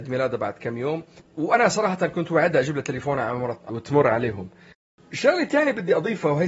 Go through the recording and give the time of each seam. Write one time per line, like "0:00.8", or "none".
0:03.7